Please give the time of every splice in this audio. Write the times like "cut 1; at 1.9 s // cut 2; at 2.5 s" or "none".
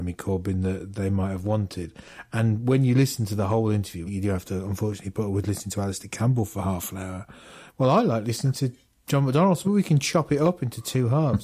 cut 1; at 4.1 s // cut 2; at 7.7 s // cut 3; at 9.6 s